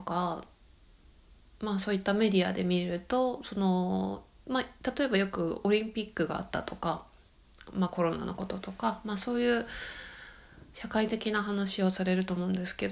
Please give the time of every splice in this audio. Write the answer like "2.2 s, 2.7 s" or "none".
none